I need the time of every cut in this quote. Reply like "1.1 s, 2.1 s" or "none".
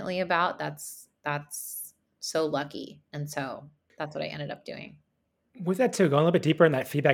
none